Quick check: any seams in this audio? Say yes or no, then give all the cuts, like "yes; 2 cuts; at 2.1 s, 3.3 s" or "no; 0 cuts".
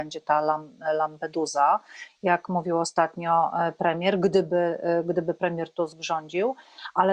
no; 0 cuts